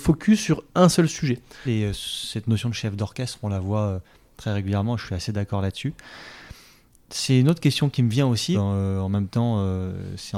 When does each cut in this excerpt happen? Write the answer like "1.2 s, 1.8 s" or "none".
1.6 s, 8.5 s

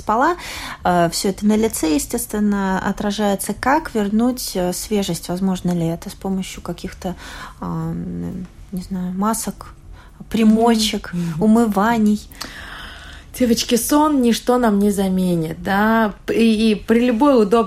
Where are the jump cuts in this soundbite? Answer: none

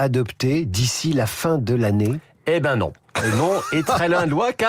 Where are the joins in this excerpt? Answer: none

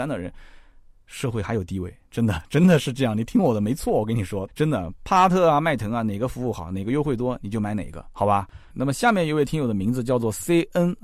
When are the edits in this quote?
4.5 s, 8.7 s

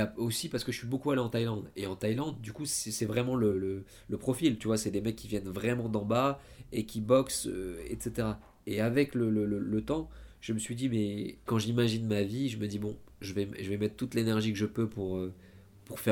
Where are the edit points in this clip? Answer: 11.5 s

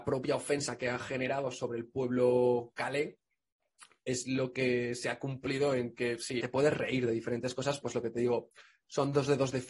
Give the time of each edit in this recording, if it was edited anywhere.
6.4 s, 7.8 s

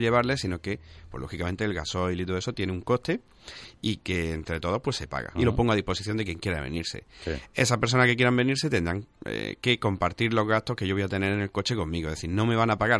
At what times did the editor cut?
5.4 s

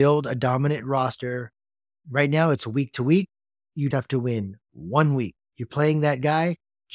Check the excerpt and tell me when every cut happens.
3.9 s, 5.5 s

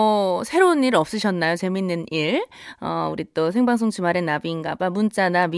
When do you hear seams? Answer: none

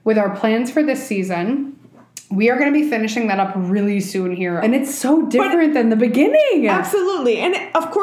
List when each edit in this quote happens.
4.6 s

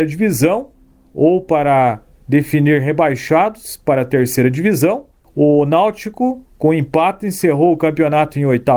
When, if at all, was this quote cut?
none

